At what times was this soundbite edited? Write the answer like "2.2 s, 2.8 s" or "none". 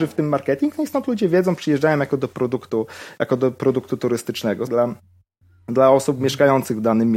4.7 s